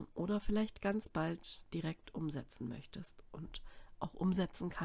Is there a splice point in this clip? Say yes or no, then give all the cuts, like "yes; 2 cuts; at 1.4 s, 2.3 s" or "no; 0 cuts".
no; 0 cuts